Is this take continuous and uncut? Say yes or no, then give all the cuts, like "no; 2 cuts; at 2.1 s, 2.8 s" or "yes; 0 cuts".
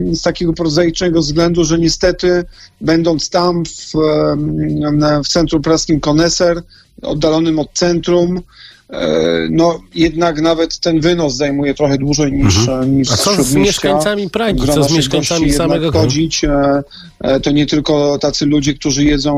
no; 1 cut; at 15.9 s